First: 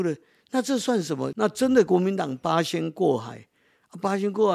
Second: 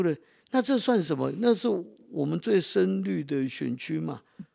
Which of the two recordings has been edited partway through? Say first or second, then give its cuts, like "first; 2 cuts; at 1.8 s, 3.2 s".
first; 1 cut; at 1.3 s